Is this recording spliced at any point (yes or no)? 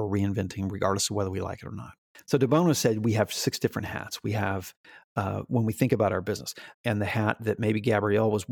yes